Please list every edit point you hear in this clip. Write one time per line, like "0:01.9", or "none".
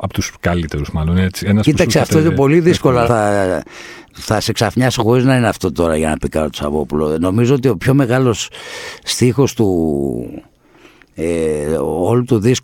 0:03.0